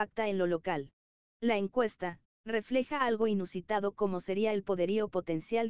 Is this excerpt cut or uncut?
cut